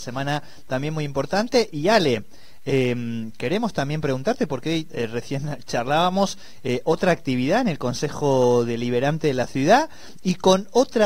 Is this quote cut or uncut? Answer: uncut